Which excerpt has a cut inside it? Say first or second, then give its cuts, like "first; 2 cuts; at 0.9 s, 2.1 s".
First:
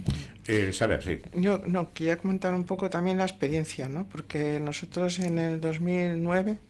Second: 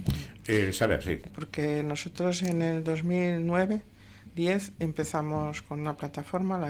second; 1 cut; at 1.3 s